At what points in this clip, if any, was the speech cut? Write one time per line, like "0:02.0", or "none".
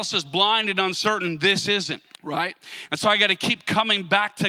0:02.1